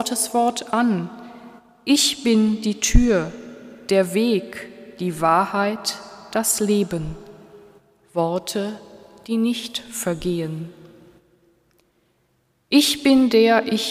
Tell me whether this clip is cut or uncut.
uncut